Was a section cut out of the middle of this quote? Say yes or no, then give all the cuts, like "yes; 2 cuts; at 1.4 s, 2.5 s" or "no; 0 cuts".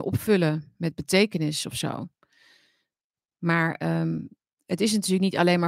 no; 0 cuts